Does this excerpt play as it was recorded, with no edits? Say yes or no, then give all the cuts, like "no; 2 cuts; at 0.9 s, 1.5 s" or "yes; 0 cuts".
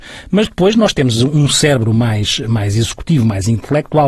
yes; 0 cuts